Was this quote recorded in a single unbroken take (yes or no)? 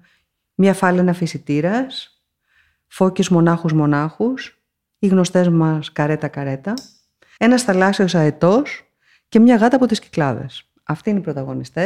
no